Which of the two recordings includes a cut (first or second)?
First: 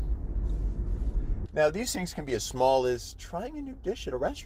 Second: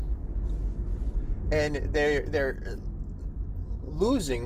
first